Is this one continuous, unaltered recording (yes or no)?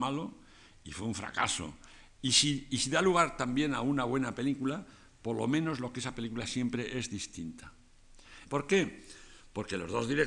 no